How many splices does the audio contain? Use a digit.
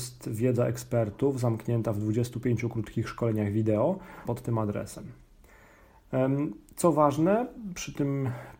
1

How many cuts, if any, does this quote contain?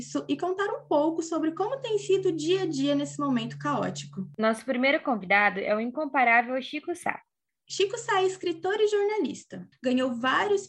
1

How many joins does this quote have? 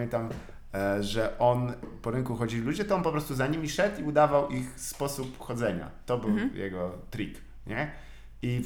1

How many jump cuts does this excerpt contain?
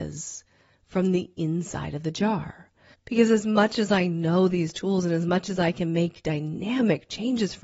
1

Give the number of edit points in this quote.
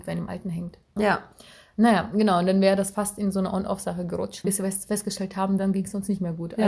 3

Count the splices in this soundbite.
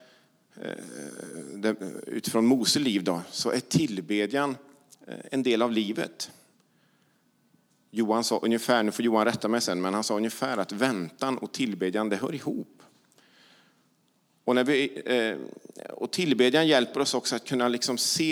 0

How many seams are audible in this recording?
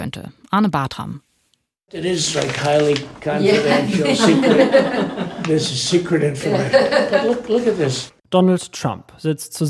0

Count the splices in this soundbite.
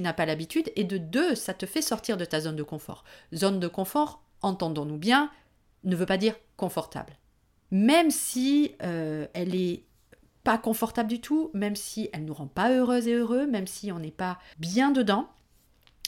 2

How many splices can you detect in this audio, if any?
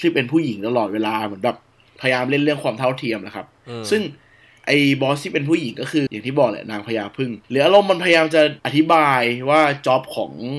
3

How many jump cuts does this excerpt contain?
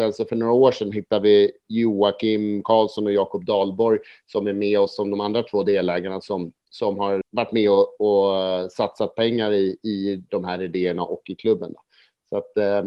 1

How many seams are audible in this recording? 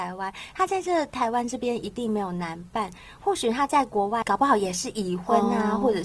0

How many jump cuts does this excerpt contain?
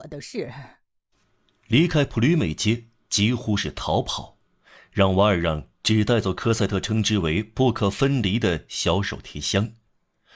0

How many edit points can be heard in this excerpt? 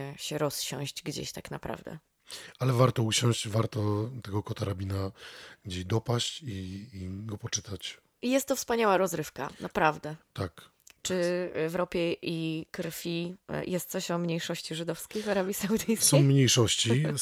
1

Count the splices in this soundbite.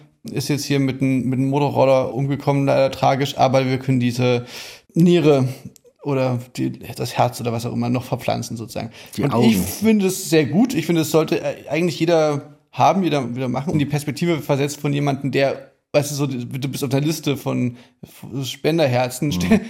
1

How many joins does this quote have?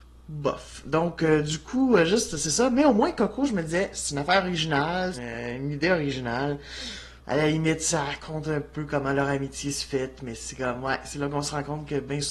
2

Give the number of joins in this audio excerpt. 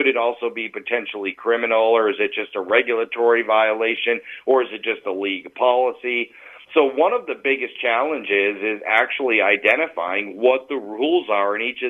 1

